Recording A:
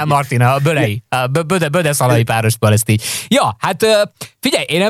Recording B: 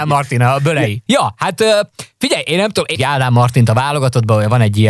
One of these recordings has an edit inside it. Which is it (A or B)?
B